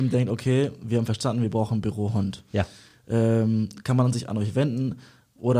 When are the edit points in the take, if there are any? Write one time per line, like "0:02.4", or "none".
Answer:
none